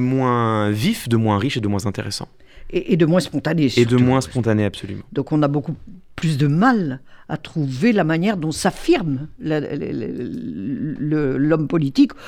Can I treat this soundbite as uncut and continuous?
yes; 0 cuts

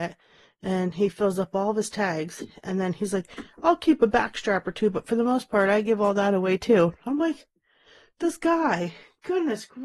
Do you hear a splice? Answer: no; 0 cuts

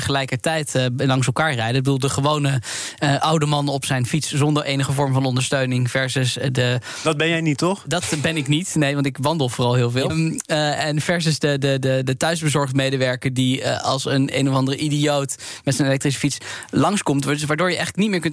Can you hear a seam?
yes; 1 cut; at 10.1 s

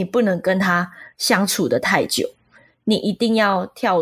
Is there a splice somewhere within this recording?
no; 0 cuts

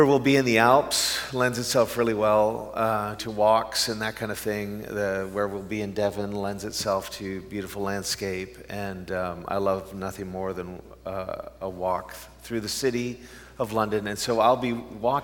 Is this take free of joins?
no; 1 cut; at 3.2 s

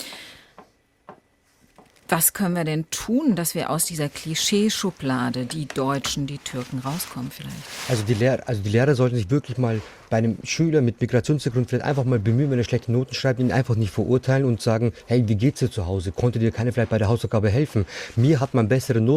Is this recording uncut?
yes; 0 cuts

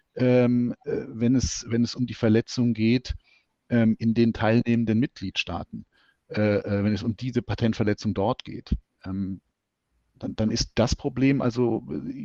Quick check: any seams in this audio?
no; 0 cuts

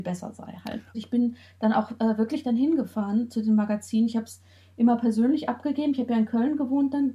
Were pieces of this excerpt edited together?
yes; 1 cut; at 0.9 s

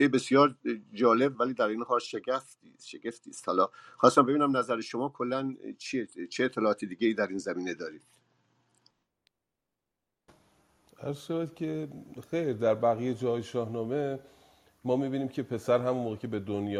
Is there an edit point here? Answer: yes; 1 cut; at 1.3 s

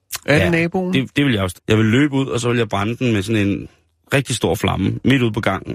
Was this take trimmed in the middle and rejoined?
yes; 1 cut; at 1.5 s

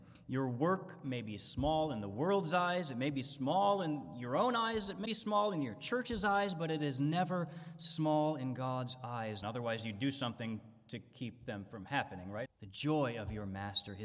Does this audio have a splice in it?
yes; 3 cuts; at 5.1 s, 9.4 s, 12.5 s

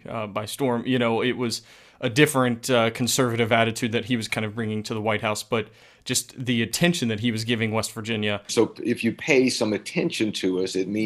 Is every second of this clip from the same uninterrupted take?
no; 1 cut; at 8.5 s

